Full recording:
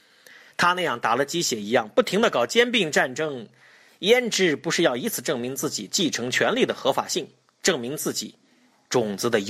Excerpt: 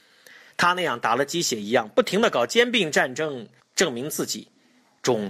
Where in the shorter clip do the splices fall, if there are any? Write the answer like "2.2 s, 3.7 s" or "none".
3.6 s

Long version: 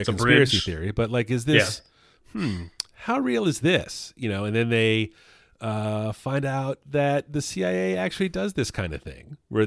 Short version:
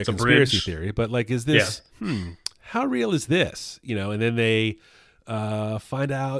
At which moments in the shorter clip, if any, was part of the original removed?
1.9 s

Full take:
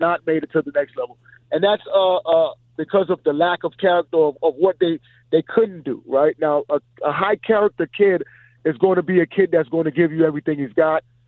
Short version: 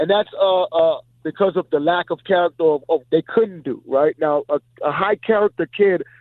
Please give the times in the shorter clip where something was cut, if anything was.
3.0 s

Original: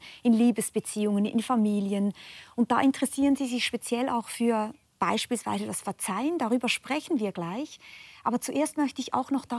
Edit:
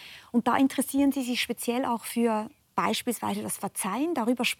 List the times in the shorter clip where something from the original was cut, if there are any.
none

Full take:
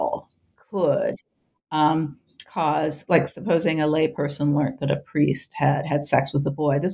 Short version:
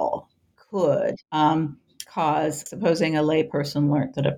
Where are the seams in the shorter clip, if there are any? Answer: 1.2 s, 2.7 s

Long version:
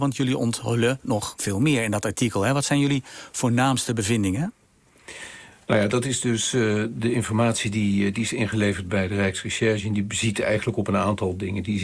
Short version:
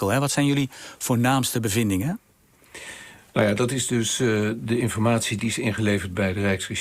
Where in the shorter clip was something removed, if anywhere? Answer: 5.4 s

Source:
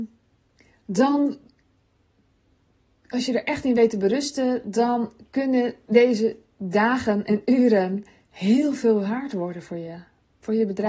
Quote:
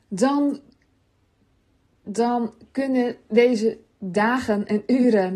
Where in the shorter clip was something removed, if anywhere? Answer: 2.1 s

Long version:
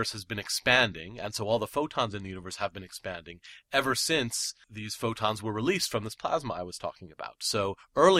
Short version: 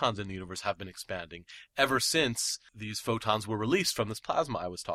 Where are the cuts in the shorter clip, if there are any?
none

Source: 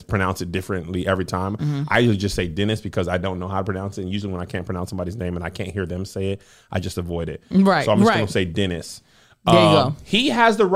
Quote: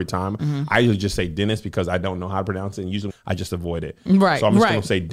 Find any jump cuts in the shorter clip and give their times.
3.1 s

